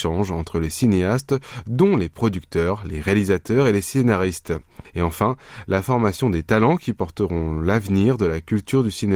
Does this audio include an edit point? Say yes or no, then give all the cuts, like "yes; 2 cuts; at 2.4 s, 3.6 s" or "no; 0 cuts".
yes; 1 cut; at 4.8 s